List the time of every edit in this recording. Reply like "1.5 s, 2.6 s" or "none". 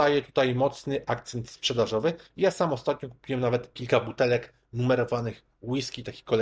none